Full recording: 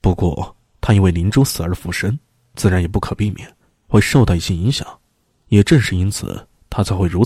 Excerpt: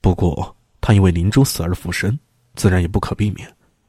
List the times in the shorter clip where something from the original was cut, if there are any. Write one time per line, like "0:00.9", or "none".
none